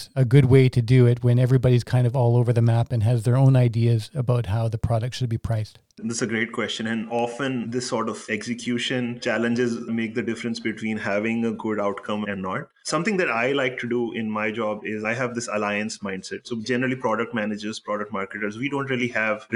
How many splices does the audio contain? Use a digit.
0